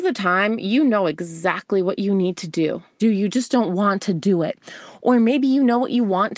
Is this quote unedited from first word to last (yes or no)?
no